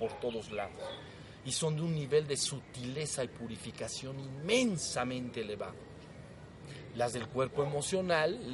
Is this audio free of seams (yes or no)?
yes